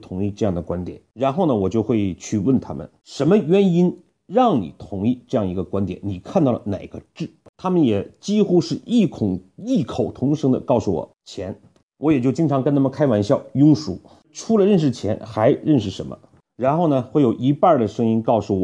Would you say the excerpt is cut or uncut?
uncut